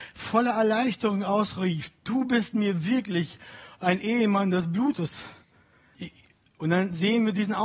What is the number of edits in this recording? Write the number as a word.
one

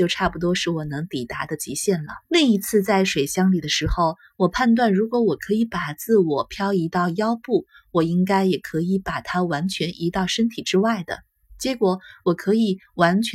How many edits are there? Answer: one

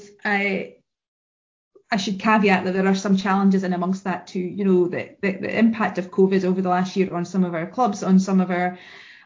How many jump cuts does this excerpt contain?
zero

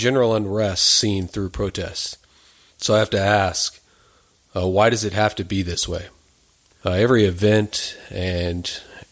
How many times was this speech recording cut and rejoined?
two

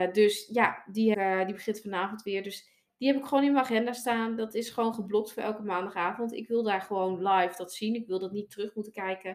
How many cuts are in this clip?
one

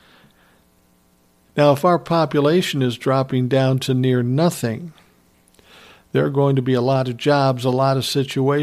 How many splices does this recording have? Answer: one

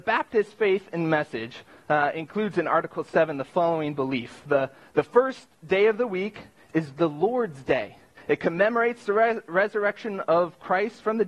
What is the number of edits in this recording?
one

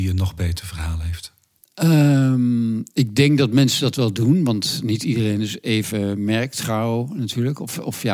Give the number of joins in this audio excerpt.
zero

